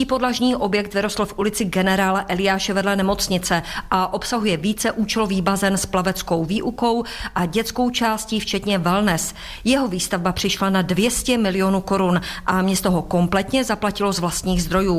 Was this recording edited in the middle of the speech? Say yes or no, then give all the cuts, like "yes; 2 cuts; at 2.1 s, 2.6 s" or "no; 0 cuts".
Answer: no; 0 cuts